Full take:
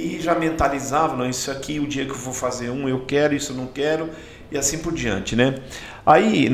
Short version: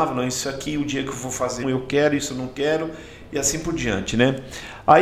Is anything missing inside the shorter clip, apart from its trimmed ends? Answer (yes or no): yes